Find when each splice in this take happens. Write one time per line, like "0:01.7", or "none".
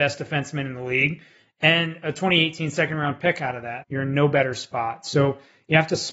0:03.8